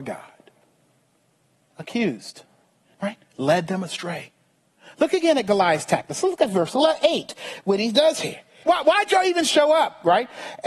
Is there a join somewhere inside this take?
yes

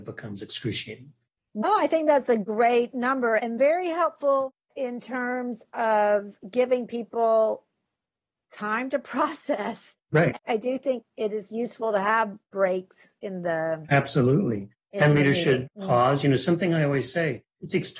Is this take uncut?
no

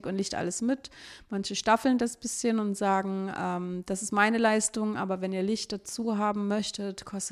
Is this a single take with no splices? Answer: yes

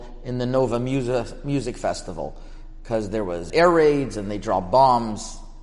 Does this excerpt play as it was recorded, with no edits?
no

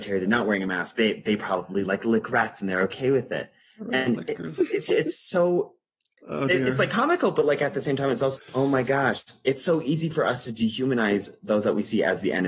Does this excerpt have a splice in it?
yes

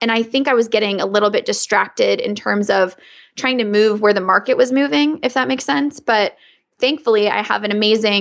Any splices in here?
no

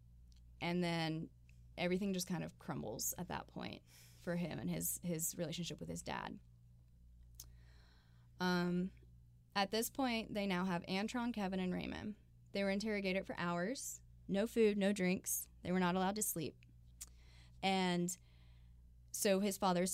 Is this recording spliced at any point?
yes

